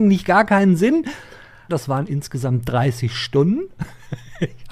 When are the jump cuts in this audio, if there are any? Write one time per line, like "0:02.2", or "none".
0:01.7